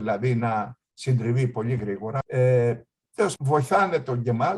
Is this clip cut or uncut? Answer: cut